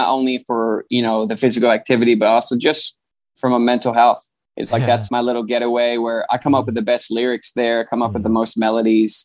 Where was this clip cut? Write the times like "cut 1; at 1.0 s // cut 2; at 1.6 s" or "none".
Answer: cut 1; at 5.1 s

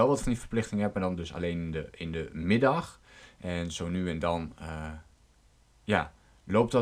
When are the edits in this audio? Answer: none

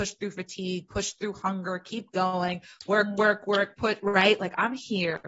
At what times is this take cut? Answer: cut 1; at 4.4 s

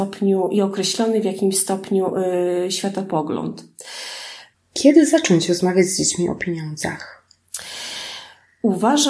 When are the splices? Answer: cut 1; at 4.5 s

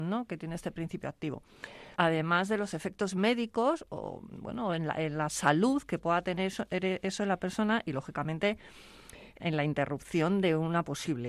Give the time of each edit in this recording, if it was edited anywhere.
cut 1; at 2.0 s // cut 2; at 9.4 s

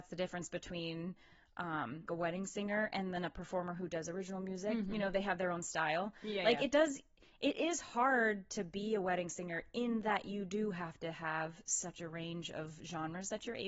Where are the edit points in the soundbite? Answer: cut 1; at 2.1 s

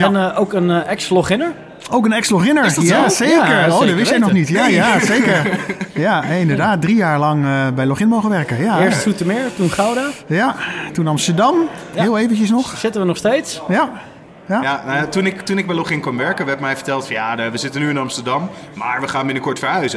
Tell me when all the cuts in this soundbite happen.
none

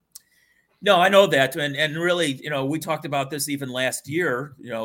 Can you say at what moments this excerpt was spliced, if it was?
none

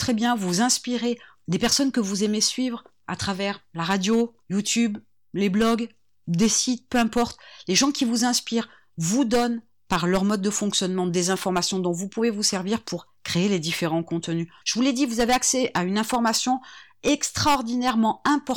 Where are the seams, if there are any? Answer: cut 1; at 14.6 s

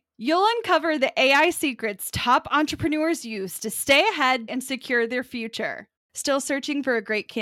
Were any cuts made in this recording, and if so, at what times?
cut 1; at 4.5 s // cut 2; at 6.0 s

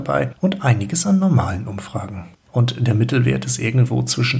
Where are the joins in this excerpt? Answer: cut 1; at 2.5 s

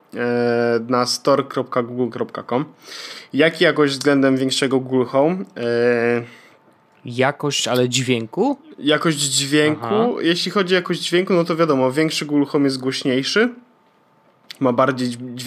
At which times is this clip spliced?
none

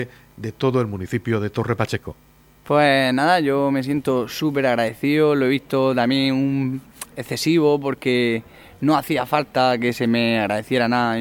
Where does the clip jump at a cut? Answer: none

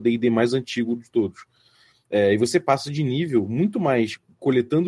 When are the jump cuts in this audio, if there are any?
none

